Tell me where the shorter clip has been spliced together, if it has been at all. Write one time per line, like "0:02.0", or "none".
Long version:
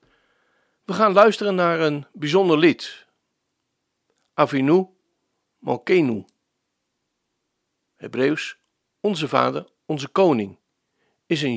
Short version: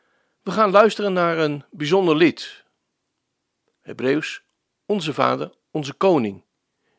0:03.8

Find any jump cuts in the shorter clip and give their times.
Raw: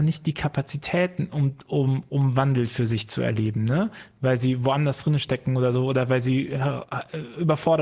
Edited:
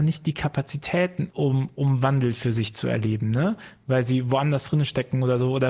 0:01.3

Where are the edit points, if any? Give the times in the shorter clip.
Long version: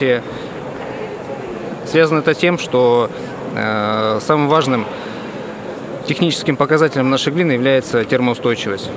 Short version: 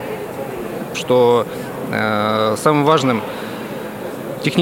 0:00.9

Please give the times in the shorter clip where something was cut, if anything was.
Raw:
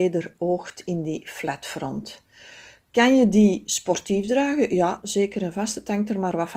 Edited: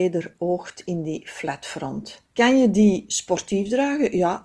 0:02.3

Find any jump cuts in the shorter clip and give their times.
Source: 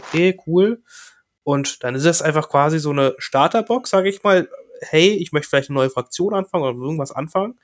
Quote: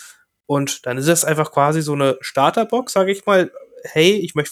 none

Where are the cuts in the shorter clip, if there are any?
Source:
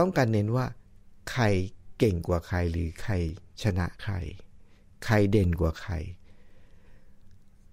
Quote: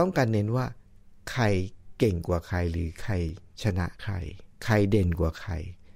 0:04.5

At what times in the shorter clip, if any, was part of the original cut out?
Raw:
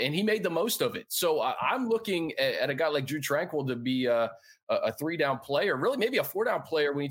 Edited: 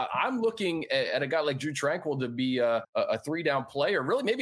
0:02.8

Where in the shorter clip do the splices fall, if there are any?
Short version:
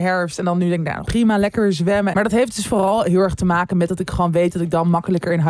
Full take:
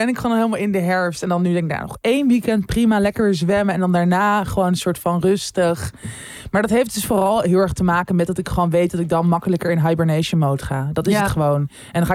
0:01.1
0:02.1

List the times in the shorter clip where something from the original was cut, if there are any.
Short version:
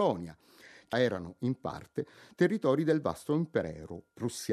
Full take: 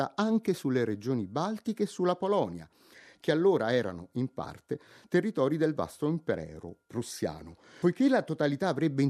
0:00.9

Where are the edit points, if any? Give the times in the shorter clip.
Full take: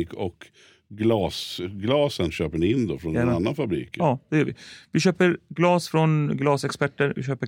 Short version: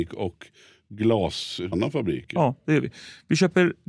0:01.7

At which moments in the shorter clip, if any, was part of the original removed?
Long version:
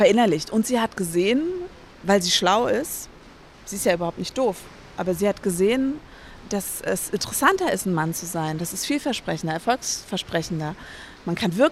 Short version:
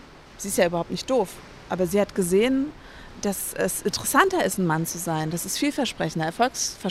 none

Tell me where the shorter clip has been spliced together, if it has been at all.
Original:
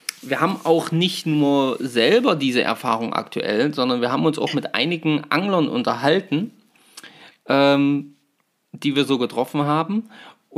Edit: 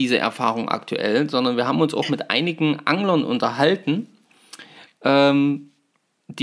none

